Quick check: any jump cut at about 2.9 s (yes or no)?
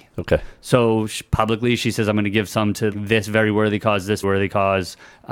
yes